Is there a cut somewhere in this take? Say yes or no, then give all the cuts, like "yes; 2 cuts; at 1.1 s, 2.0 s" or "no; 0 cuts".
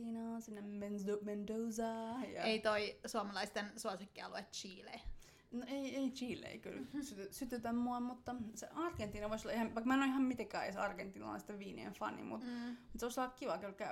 no; 0 cuts